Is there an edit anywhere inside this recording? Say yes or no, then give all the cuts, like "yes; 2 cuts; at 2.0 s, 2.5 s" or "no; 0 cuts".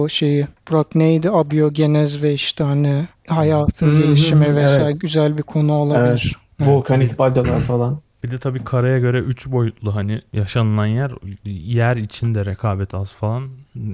no; 0 cuts